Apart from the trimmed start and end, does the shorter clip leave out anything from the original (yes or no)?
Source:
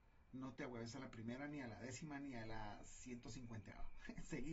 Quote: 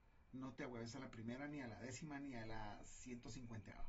no